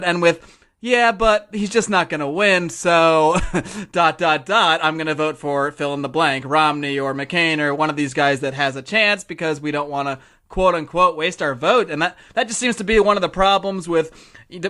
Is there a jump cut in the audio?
no; 0 cuts

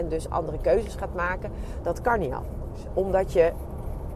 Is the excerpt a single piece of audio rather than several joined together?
no; 1 cut; at 1.8 s

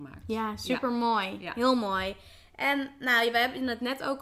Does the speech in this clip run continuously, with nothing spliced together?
yes; 0 cuts

